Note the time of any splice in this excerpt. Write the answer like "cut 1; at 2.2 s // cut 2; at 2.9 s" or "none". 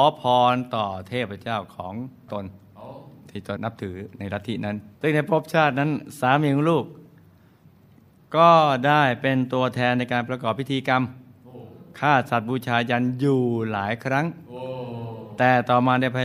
cut 1; at 3.6 s // cut 2; at 5.0 s